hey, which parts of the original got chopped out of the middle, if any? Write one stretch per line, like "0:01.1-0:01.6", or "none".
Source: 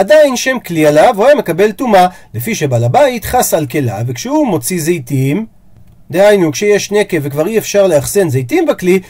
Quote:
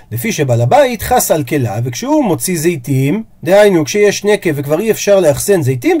0:05.6-0:06.0